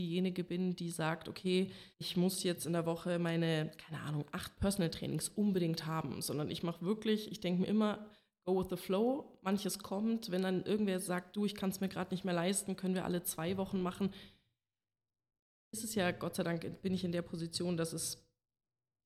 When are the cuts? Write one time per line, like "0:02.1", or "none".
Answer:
0:01.9

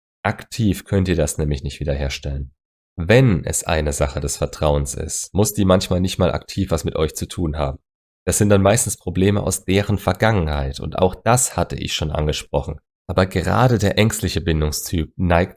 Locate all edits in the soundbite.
0:08.1
0:13.0

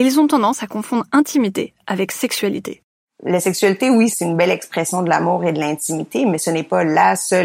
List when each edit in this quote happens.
none

